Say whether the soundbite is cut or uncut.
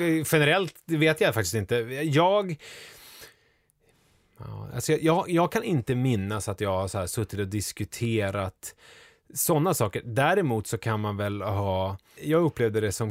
cut